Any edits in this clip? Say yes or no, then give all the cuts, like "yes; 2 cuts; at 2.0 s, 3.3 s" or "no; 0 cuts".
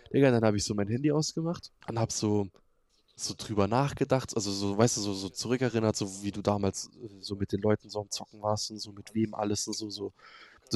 yes; 1 cut; at 1.8 s